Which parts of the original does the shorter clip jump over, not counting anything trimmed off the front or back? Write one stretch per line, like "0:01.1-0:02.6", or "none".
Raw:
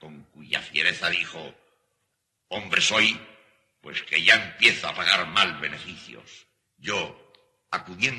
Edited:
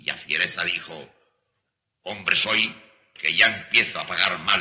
0:03.6-0:04.0